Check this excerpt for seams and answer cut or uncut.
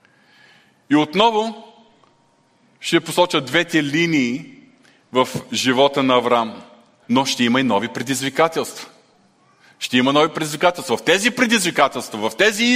cut